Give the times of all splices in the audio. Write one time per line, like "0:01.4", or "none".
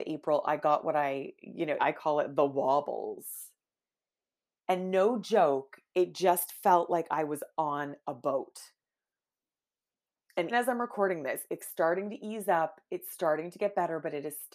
0:01.8
0:10.5
0:11.6